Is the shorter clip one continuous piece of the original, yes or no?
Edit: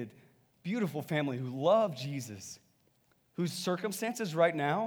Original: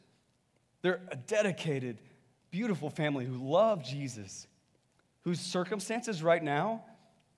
yes